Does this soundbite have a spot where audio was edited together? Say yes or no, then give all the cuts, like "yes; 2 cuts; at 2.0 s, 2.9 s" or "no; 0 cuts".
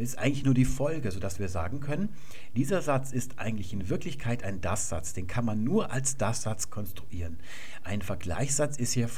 no; 0 cuts